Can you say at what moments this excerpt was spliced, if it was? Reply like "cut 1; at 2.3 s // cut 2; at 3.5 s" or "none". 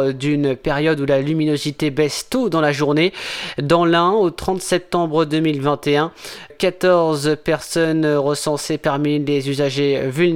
cut 1; at 6.5 s

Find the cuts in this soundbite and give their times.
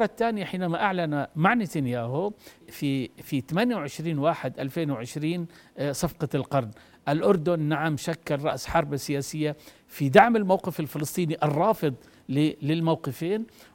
cut 1; at 2.6 s

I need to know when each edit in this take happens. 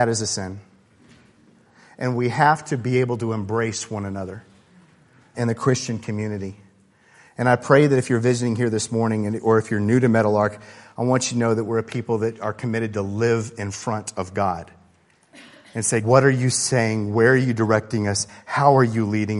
cut 1; at 5.3 s // cut 2; at 16.0 s

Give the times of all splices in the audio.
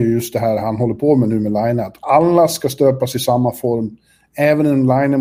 none

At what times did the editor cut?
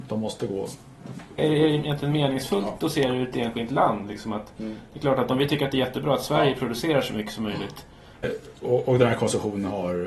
cut 1; at 1.4 s // cut 2; at 8.2 s

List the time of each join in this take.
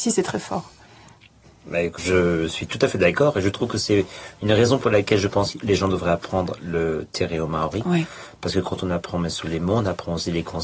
cut 1; at 2.0 s

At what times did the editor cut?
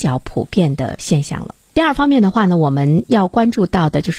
none

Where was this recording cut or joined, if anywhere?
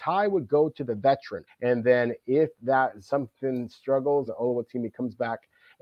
cut 1; at 1.5 s // cut 2; at 4.3 s

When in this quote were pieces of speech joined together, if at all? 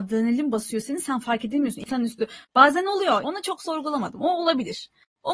cut 1; at 3.2 s

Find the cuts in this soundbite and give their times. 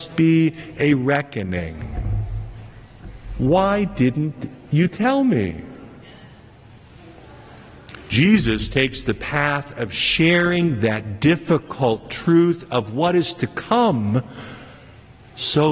none

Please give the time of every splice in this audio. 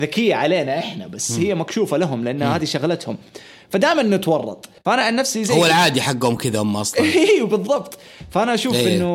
cut 1; at 4.8 s

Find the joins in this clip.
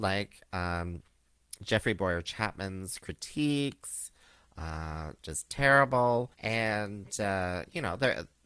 cut 1; at 5.2 s // cut 2; at 6.3 s

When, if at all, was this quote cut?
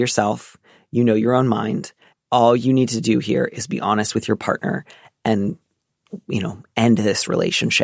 cut 1; at 2.1 s

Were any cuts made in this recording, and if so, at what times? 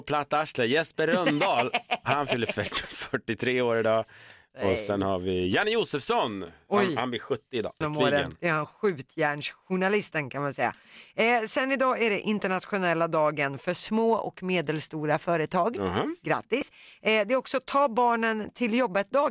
cut 1; at 7.8 s

